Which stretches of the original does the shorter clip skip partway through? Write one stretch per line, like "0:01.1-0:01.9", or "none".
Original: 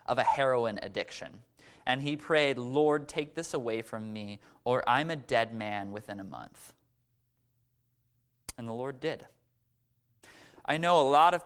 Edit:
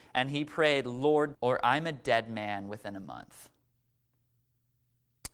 0:03.1-0:04.6